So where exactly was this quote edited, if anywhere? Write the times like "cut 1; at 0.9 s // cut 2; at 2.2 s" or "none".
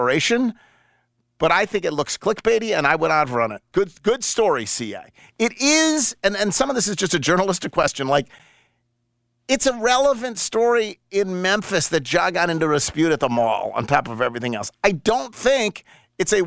cut 1; at 3.7 s